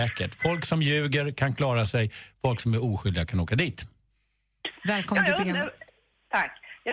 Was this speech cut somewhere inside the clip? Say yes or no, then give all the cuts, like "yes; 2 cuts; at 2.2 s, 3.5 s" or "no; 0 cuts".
yes; 1 cut; at 4.8 s